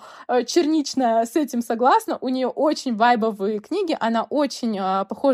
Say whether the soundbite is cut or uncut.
uncut